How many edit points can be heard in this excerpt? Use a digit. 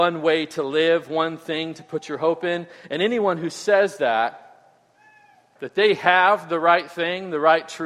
1